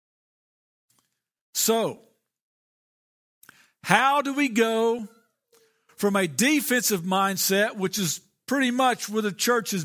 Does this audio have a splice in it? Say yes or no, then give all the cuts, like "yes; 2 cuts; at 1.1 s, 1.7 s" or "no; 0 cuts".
no; 0 cuts